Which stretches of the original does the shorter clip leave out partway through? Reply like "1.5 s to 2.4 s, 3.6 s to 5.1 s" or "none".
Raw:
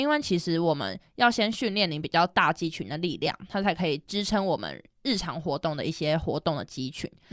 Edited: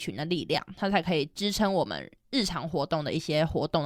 none